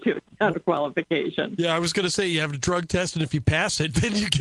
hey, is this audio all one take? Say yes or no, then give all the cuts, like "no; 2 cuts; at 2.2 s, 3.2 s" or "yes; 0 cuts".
yes; 0 cuts